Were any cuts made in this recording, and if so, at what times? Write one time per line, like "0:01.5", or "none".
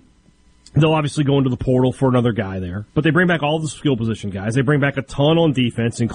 0:02.9